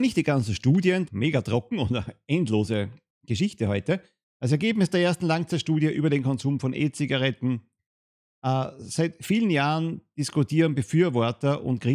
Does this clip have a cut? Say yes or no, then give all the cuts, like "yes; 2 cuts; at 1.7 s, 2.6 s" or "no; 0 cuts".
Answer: yes; 2 cuts; at 1.1 s, 4.2 s